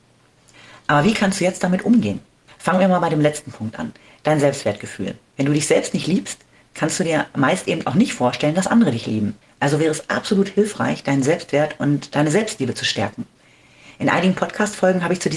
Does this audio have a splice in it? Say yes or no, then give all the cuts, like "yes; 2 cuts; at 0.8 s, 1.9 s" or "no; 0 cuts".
no; 0 cuts